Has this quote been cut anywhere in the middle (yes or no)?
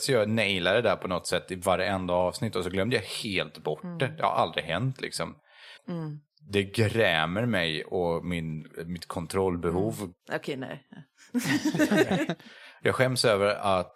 yes